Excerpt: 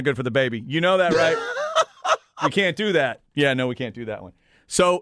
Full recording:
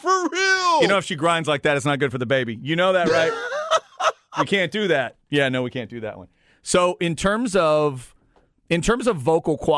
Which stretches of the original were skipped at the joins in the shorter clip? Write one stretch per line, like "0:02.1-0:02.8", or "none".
none